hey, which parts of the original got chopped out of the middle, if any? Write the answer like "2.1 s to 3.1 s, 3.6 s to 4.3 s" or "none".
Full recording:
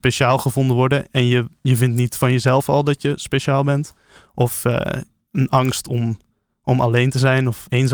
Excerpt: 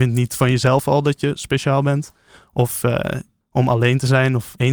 5.2 s to 6.5 s

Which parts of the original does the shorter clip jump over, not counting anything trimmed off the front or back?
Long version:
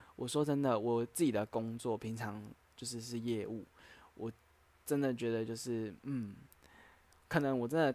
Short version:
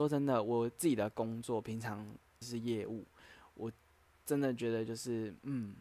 2.8 s to 3.0 s

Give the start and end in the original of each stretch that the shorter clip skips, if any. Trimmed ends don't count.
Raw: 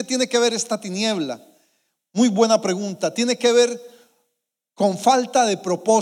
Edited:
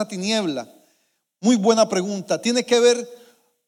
none

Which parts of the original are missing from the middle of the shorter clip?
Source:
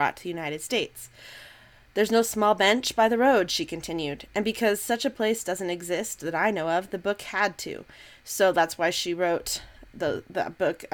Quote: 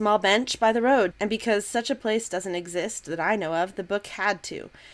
3.5 s to 4.3 s

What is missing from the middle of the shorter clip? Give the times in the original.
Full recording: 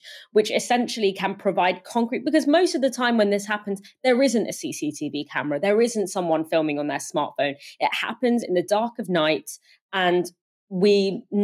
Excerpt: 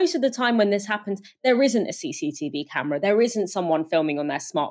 none

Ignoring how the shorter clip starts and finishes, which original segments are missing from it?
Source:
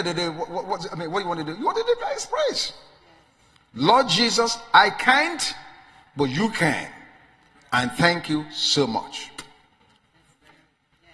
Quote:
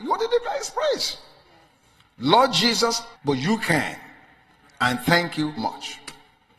4.7 s to 6.0 s, 8.5 s to 8.9 s

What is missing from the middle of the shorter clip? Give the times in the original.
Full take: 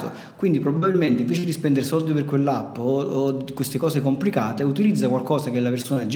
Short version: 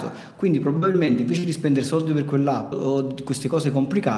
2.7 s to 3.0 s

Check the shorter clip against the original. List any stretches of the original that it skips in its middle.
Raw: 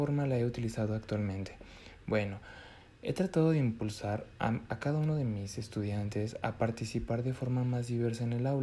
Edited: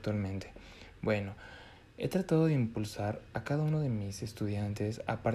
4.4 s to 4.7 s

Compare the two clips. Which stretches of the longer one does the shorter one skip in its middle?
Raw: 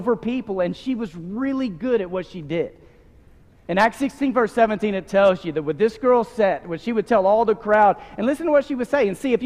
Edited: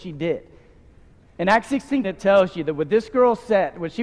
4.3 s to 4.9 s

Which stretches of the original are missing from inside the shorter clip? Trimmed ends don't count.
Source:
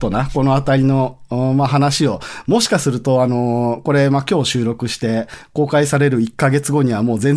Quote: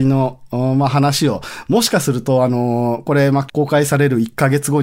4.2 s to 5.5 s

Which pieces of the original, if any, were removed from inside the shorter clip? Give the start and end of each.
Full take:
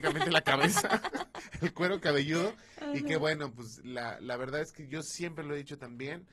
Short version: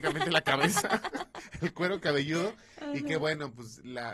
none

